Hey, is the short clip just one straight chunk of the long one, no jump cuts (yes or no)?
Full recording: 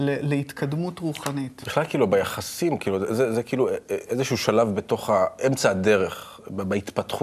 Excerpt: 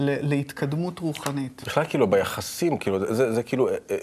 yes